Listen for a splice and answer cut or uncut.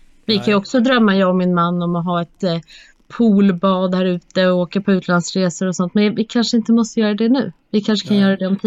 uncut